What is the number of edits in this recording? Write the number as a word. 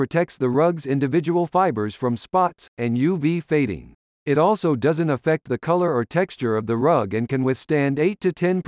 two